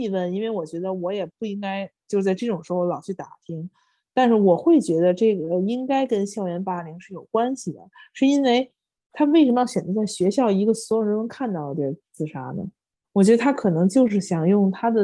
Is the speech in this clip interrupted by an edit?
no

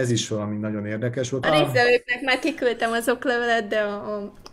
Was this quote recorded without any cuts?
no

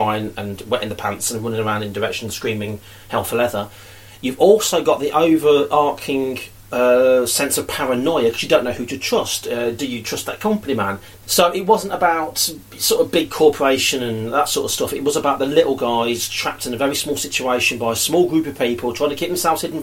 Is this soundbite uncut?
no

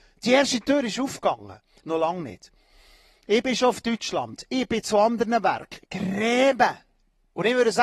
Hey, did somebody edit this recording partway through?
yes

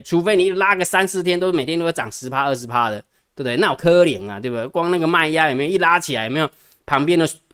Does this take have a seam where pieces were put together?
no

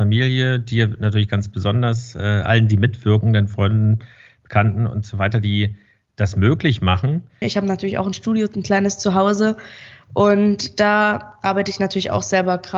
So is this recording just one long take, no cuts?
no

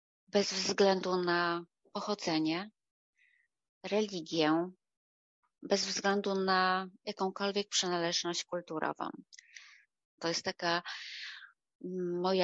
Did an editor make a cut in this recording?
yes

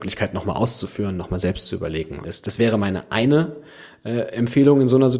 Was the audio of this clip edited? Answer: yes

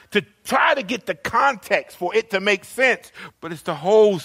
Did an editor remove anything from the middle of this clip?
yes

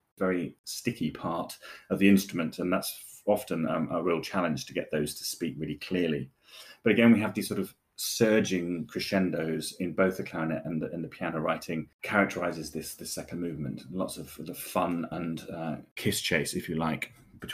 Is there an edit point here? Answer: no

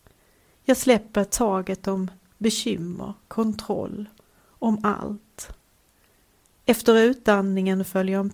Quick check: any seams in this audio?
no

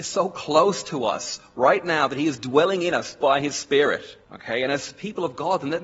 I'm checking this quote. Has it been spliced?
yes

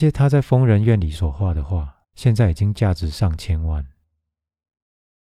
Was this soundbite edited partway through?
yes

